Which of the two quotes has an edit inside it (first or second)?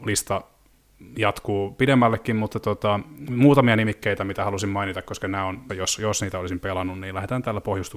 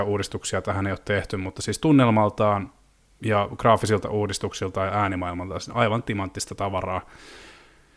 first